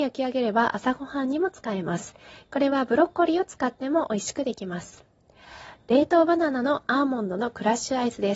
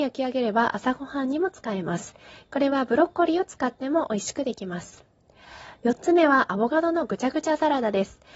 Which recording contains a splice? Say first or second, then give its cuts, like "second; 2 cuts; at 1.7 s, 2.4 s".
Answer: first; 1 cut; at 5.8 s